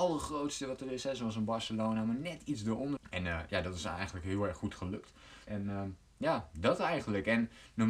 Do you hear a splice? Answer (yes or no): yes